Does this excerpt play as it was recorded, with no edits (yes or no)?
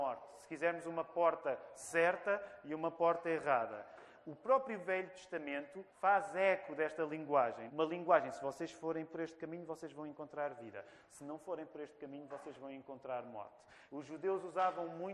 no